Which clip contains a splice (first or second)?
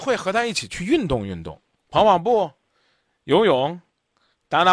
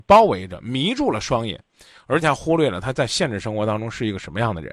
second